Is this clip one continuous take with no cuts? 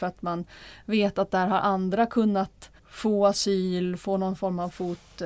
no; 1 cut; at 2.8 s

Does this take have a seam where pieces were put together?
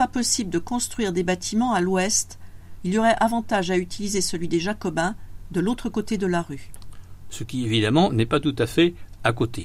yes; 1 cut; at 2.8 s

